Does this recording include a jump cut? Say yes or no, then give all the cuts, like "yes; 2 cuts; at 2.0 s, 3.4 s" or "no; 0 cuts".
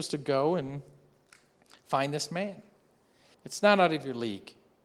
yes; 1 cut; at 3.3 s